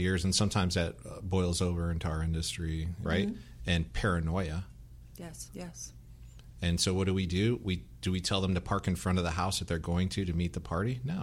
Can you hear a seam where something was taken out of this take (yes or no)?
yes